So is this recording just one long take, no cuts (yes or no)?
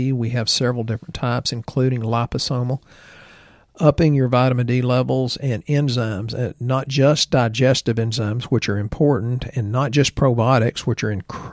yes